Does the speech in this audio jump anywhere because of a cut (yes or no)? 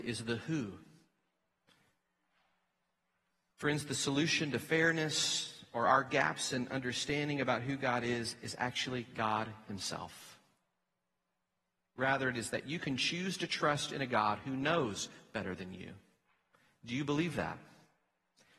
yes